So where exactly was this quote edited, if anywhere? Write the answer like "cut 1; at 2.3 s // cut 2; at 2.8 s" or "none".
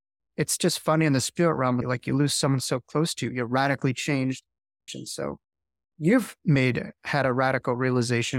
cut 1; at 1.8 s // cut 2; at 4.9 s